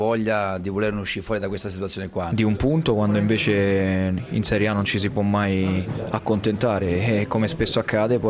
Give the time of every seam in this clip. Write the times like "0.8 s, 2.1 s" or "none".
2.3 s